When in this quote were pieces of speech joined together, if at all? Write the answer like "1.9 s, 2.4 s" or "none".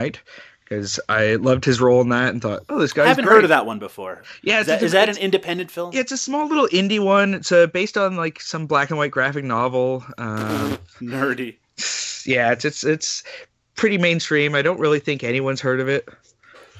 none